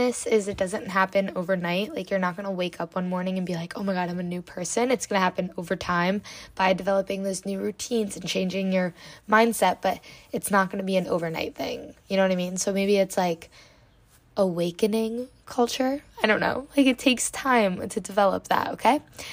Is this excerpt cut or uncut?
uncut